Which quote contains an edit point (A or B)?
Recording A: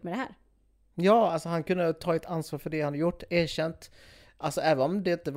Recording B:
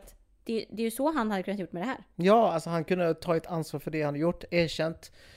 B